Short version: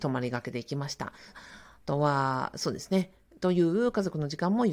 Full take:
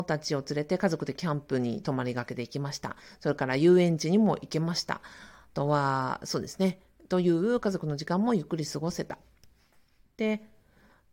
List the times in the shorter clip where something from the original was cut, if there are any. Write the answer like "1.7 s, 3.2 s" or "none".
1.3 s